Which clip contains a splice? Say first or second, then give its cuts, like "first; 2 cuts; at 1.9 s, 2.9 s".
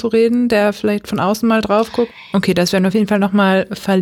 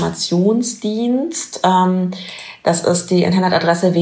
first; 1 cut; at 2.3 s